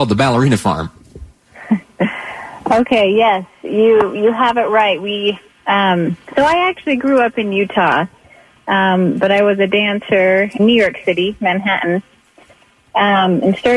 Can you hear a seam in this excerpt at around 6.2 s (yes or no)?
yes